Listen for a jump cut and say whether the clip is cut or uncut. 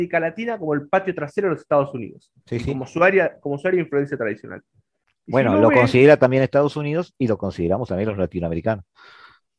uncut